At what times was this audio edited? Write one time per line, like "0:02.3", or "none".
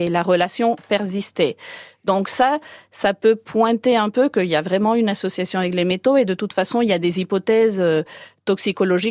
none

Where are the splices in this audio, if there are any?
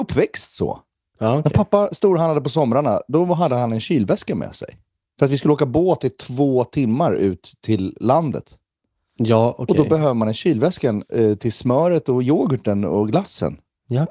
none

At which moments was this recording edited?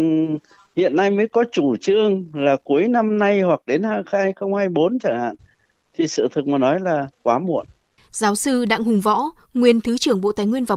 0:08.0

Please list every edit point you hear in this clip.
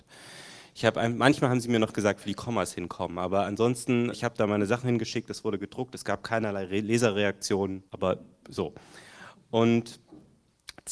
0:04.1
0:07.9

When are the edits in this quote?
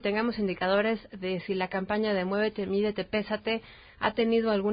none

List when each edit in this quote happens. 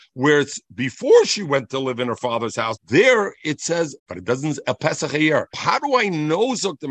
0:02.8
0:04.0
0:05.5

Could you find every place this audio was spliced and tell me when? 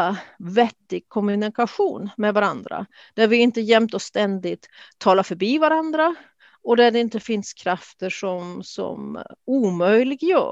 none

